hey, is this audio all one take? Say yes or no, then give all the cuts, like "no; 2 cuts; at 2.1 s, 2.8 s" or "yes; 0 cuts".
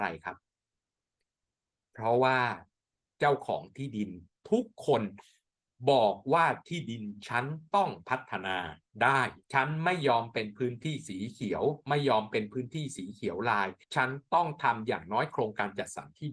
no; 2 cuts; at 9.4 s, 13.8 s